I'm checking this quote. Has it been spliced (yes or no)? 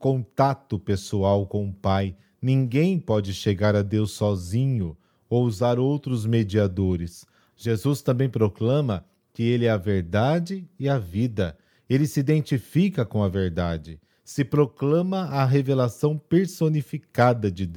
yes